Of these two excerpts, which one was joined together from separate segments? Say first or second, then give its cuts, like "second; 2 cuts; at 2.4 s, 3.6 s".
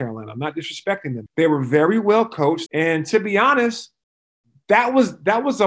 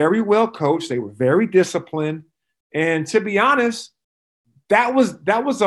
first; 2 cuts; at 1.3 s, 2.7 s